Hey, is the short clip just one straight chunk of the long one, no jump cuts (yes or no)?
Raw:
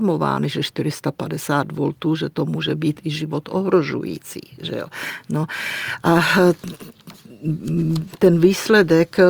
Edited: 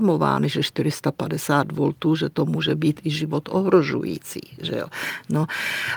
yes